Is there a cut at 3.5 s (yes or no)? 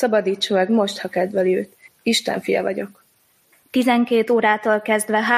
yes